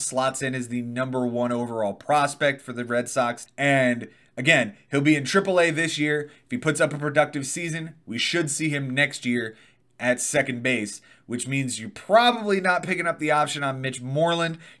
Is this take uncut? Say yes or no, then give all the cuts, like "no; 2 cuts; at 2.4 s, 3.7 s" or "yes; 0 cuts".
no; 1 cut; at 3.5 s